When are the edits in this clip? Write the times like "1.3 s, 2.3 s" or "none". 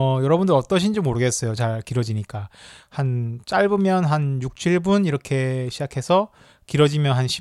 1.6 s